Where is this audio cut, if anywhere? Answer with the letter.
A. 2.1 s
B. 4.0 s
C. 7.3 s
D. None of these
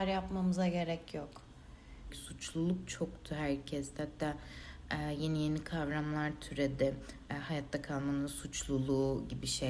A